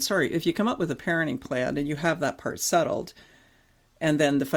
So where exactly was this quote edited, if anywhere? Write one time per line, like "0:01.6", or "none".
none